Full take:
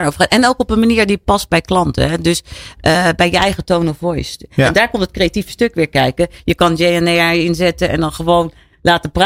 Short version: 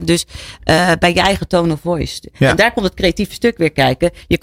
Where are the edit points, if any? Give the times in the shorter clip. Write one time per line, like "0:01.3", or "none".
none